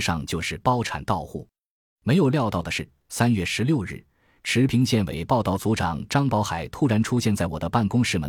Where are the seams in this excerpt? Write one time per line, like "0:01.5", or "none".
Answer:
none